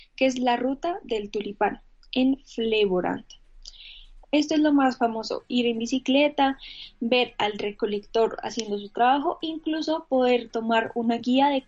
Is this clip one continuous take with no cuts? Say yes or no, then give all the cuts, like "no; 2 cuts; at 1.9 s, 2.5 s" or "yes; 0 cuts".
no; 1 cut; at 4.2 s